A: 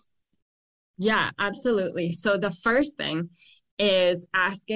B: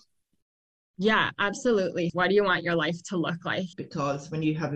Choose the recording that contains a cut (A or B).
B